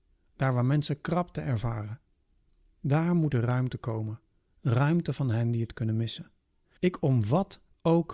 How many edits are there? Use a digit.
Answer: 1